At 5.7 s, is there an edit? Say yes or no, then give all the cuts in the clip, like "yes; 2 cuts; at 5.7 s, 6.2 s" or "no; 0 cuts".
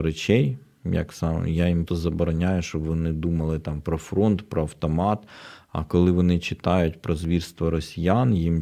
no; 1 cut; at 1.9 s